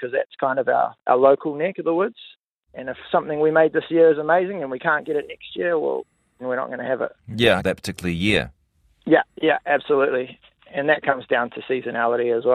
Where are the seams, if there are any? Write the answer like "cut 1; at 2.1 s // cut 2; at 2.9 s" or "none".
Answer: cut 1; at 2.7 s // cut 2; at 6.4 s // cut 3; at 7.6 s